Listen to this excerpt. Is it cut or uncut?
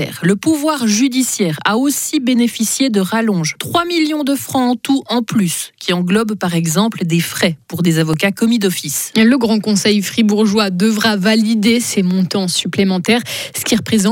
uncut